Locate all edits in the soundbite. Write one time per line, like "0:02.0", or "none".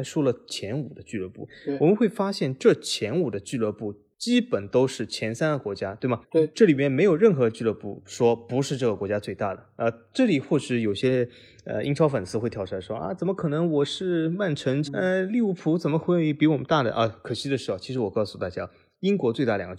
0:06.2
0:14.8